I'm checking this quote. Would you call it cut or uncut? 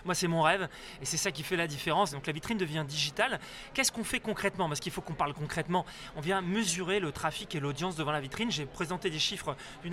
cut